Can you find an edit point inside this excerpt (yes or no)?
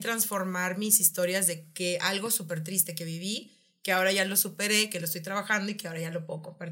no